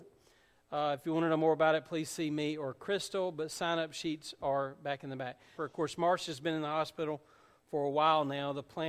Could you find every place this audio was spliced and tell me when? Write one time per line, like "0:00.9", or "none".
0:05.6